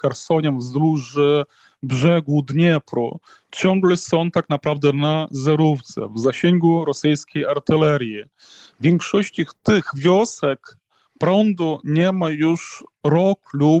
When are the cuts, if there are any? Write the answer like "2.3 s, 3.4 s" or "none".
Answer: none